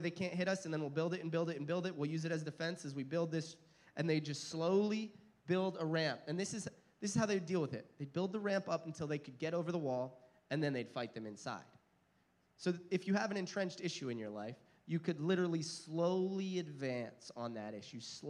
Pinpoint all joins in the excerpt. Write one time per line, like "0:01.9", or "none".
none